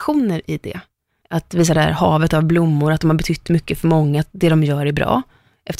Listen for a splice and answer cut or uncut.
cut